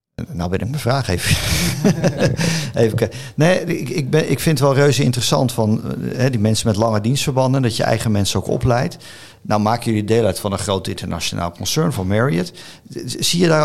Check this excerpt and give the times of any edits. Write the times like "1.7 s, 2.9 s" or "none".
none